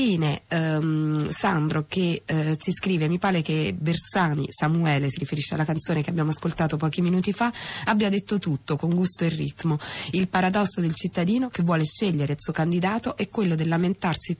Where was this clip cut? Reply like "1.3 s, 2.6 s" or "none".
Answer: none

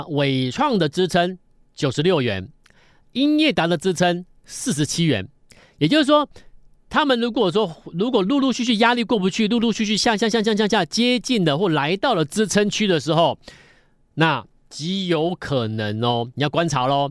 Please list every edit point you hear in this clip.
none

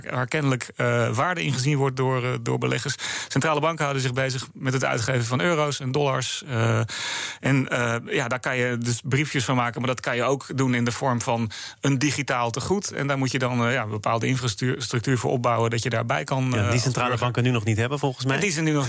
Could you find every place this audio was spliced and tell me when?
none

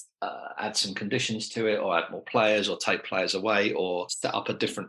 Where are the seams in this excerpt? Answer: none

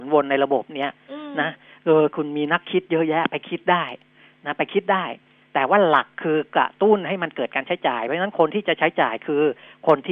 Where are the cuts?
none

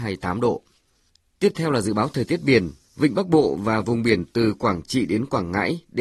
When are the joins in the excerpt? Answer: 2.8 s

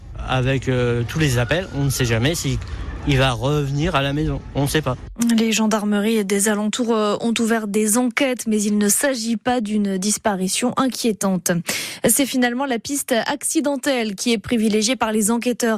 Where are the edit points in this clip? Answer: none

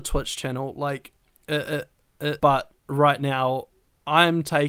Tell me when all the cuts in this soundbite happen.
2.4 s

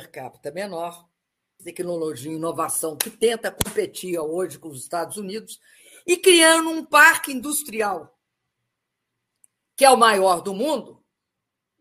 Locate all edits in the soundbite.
1.6 s

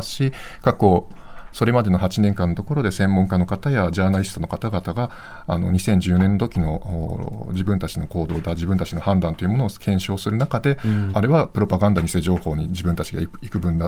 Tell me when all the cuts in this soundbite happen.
11.1 s

